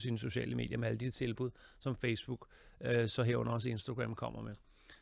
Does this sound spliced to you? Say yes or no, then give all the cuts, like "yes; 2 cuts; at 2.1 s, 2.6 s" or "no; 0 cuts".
no; 0 cuts